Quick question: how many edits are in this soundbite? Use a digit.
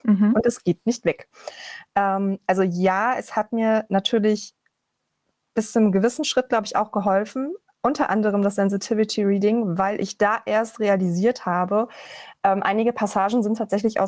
0